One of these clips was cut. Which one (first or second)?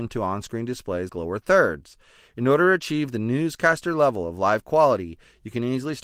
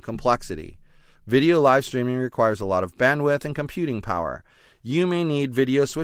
first